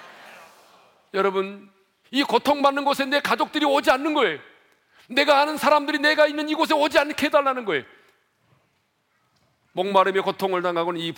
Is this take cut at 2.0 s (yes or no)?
yes